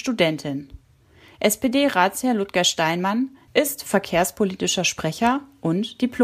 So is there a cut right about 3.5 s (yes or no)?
yes